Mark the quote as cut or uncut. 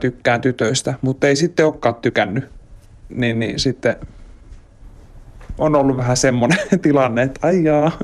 uncut